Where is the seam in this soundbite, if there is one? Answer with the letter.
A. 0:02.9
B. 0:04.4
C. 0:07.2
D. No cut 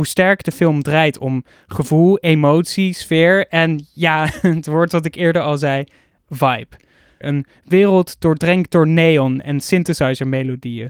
C